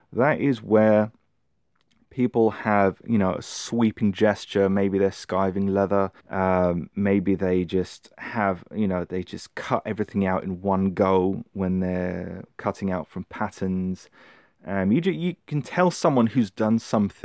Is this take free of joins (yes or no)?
no